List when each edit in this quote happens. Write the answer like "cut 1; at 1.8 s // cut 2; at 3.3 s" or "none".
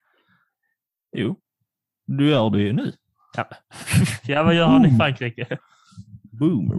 none